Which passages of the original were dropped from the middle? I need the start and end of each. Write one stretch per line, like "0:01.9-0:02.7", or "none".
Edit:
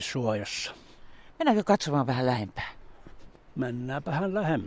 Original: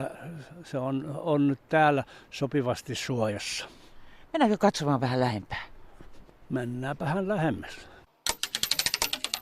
none